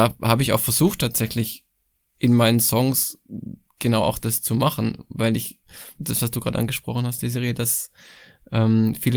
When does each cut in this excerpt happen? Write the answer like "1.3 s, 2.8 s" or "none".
6.0 s